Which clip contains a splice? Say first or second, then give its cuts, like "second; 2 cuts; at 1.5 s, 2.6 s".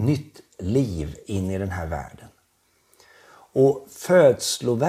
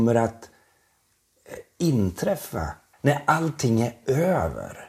second; 1 cut; at 2.9 s